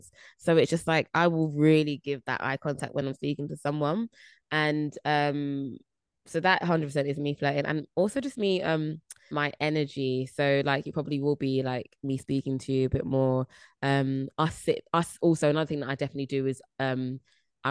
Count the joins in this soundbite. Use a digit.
1